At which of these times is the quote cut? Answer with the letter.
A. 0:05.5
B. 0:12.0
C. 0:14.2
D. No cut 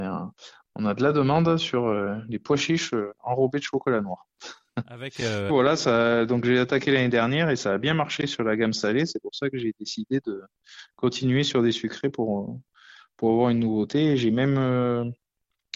A